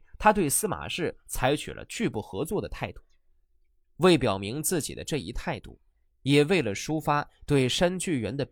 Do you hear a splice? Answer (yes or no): no